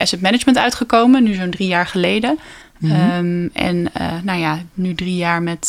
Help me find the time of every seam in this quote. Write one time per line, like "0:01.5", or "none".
0:02.6